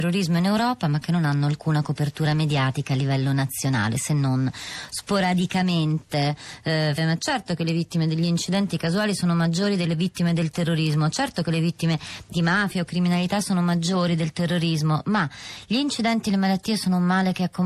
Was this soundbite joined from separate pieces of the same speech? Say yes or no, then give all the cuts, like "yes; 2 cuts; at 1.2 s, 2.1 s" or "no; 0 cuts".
yes; 1 cut; at 7.0 s